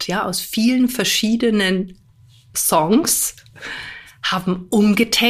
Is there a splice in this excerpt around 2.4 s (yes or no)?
no